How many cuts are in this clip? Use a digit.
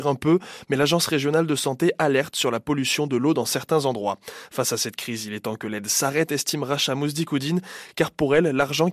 0